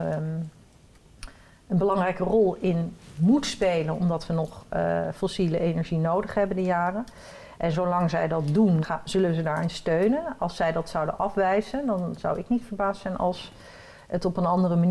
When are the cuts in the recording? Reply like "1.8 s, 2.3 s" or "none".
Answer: 8.8 s